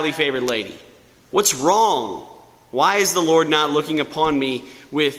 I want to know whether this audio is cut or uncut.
uncut